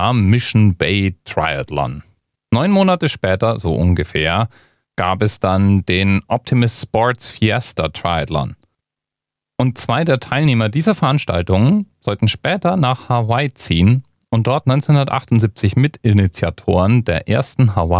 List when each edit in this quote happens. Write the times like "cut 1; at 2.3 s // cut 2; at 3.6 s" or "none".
cut 1; at 2.3 s